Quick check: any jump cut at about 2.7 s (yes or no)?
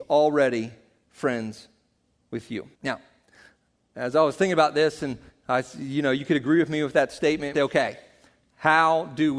yes